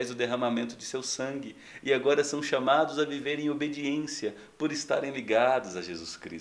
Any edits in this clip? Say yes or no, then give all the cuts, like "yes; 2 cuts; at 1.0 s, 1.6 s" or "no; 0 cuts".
no; 0 cuts